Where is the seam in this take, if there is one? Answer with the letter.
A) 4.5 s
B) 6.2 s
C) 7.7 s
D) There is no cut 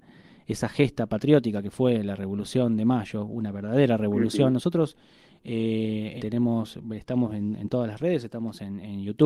B